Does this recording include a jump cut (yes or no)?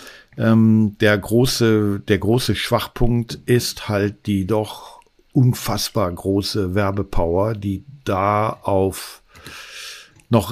no